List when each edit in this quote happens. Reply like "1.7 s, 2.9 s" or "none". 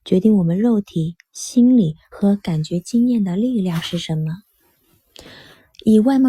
none